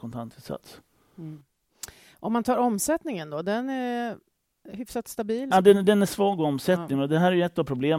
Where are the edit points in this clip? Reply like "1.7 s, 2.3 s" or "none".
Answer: 5.5 s